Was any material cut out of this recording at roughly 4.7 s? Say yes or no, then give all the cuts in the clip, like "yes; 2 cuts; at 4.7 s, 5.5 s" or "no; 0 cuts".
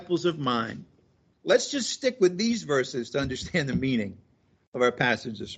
no; 1 cut; at 1.3 s